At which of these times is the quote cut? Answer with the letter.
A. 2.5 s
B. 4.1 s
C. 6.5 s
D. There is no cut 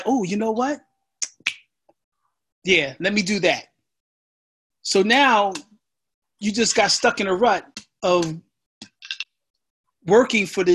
D